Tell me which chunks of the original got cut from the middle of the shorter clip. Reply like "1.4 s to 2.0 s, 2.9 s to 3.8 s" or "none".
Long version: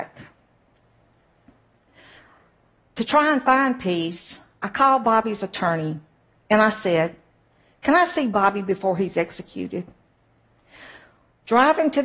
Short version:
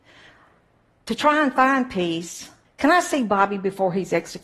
4.5 s to 7.7 s